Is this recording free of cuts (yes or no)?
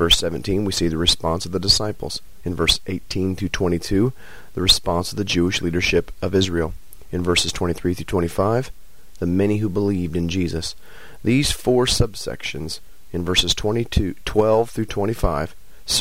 yes